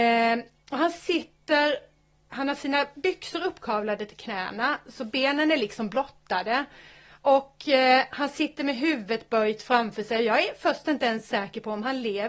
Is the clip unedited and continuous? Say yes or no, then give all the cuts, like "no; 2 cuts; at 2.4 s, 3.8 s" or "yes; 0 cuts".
yes; 0 cuts